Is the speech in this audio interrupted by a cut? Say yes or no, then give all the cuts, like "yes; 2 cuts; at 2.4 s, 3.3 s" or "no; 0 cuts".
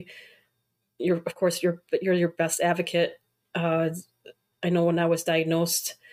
no; 0 cuts